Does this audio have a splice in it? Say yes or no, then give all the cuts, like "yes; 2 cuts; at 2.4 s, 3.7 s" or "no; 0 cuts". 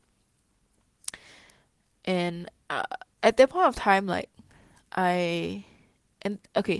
no; 0 cuts